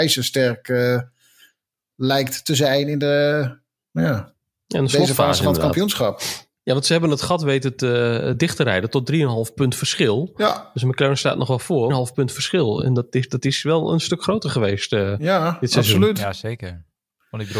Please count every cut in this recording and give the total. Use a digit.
1